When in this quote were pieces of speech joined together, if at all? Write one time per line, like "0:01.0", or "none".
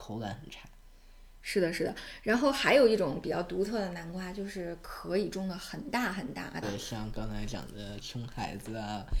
0:06.6
0:08.0